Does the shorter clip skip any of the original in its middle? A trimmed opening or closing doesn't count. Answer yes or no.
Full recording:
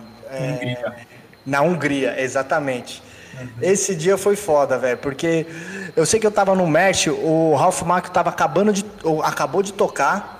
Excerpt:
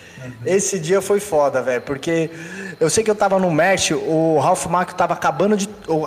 no